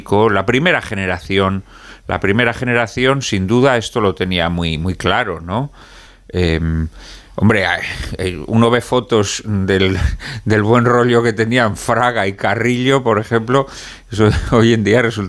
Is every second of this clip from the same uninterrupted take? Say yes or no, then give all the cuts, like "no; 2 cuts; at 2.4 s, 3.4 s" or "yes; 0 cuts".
yes; 0 cuts